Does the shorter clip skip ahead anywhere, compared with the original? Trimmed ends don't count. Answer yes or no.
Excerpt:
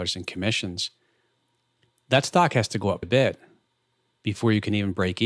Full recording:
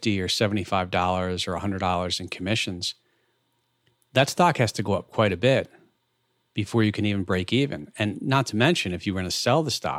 yes